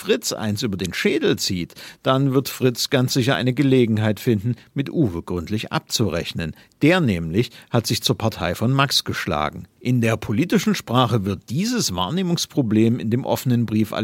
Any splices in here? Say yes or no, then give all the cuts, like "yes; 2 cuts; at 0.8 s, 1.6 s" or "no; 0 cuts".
yes; 1 cut; at 9.8 s